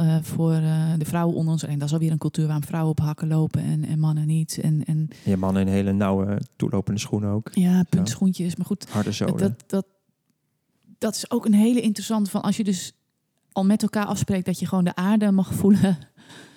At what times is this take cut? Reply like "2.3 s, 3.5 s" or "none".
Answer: none